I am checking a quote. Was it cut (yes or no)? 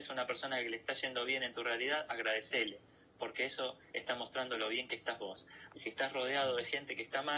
yes